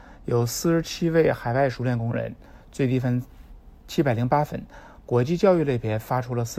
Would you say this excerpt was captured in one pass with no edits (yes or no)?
yes